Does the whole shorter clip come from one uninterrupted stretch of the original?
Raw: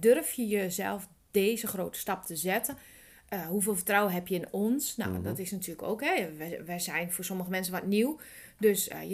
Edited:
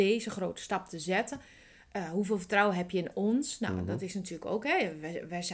yes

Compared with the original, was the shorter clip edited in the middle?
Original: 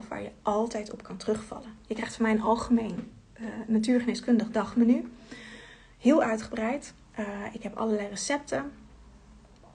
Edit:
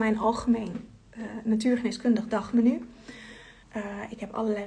yes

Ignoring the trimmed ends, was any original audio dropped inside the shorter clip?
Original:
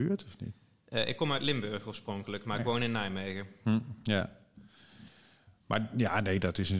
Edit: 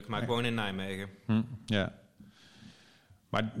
no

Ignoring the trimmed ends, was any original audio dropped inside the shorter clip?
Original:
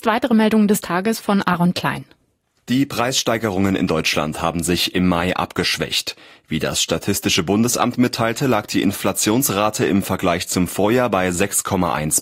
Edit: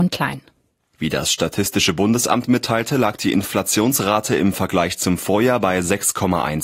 yes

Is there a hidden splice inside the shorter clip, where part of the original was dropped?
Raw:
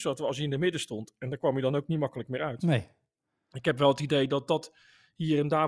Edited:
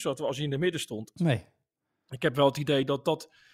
yes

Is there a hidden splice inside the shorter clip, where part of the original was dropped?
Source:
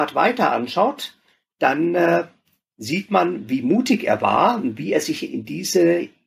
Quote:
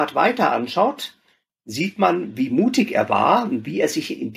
yes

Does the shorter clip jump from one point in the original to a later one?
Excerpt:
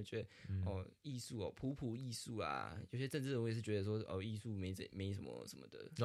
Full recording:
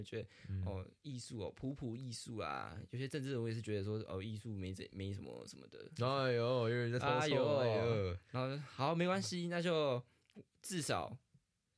no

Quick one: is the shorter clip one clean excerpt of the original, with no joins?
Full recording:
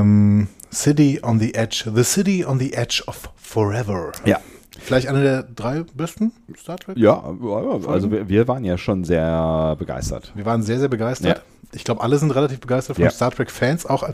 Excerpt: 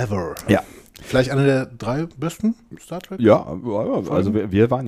yes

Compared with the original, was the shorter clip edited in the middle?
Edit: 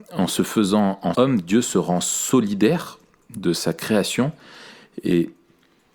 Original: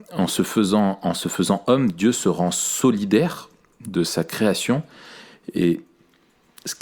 yes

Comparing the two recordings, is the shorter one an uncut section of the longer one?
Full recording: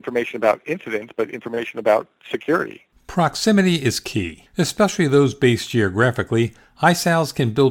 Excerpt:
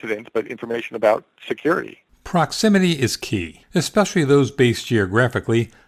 yes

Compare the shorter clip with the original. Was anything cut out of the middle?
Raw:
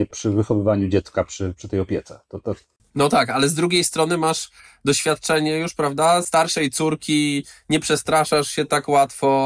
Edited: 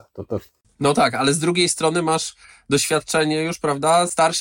no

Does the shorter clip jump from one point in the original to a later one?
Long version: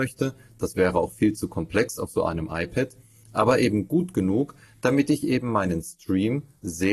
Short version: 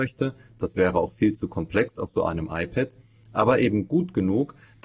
no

